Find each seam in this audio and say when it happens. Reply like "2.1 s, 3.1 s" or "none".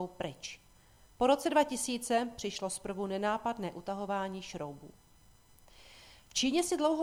none